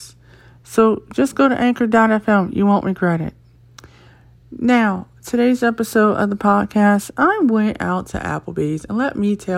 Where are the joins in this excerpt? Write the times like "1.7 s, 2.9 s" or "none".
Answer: none